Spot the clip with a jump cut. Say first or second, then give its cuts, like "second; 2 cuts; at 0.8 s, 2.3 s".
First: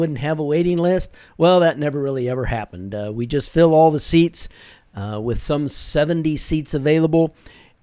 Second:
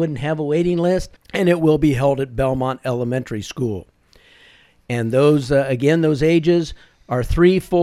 second; 1 cut; at 1.2 s